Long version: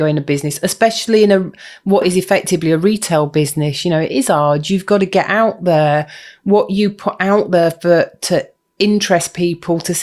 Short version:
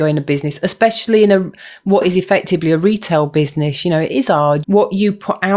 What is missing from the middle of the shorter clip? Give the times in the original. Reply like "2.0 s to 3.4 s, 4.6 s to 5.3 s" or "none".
4.6 s to 6.4 s